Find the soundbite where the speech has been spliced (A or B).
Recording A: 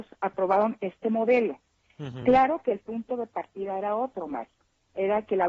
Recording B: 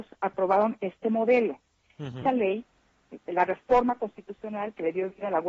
B